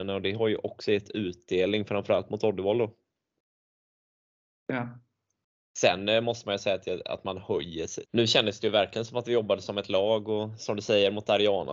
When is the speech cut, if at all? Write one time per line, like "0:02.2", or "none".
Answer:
0:08.0